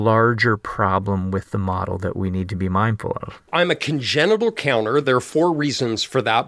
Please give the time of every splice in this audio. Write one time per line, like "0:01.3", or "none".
none